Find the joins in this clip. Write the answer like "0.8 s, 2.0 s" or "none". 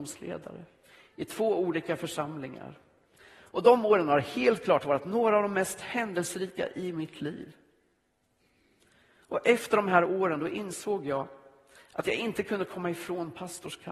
3.2 s

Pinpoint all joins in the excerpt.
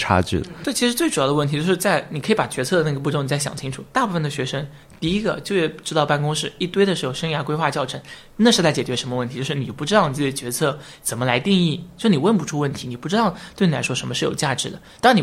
none

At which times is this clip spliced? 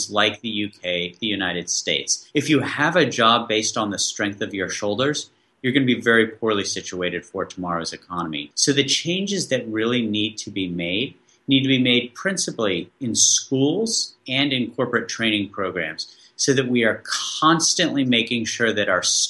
1.2 s

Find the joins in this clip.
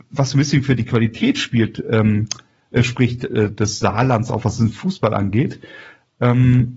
none

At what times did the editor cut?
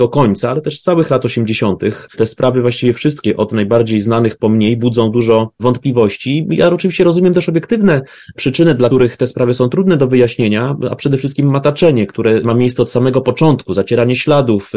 8.9 s

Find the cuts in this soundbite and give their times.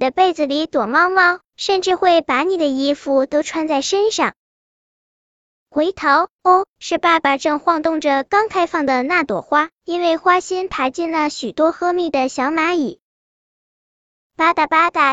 none

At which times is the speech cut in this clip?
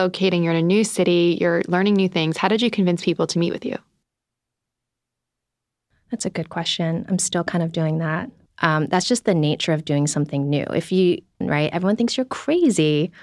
8.5 s, 11.4 s

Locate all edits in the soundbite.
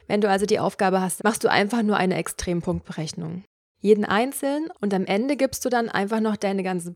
1.2 s, 3.7 s

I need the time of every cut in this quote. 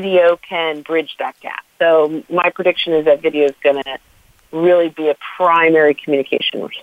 1.7 s

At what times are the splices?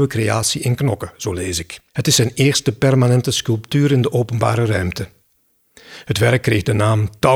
1.9 s

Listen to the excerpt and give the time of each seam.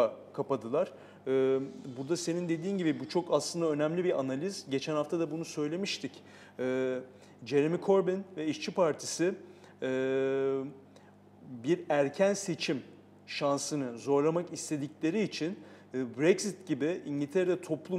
none

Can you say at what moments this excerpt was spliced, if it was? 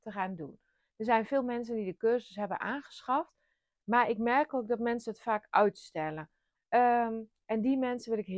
3.7 s, 6.5 s

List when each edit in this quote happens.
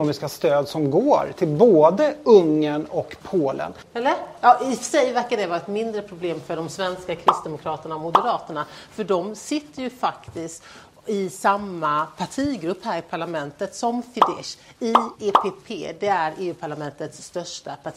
3.8 s

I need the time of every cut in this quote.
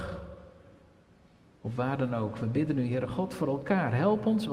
none

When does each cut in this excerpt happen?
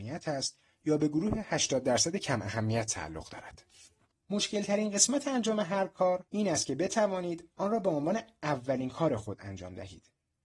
4.1 s, 6.3 s

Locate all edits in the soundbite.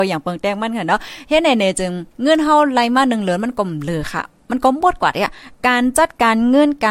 2.1 s

